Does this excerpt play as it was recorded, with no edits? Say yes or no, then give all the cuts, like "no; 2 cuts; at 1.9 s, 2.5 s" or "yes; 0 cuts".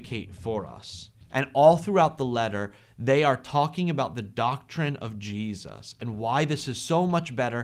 no; 1 cut; at 1.2 s